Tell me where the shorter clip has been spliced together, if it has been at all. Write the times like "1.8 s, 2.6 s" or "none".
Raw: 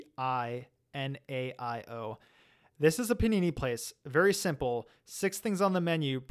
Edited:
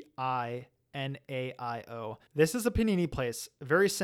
2.3 s